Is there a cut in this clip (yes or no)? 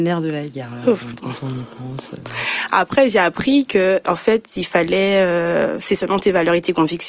no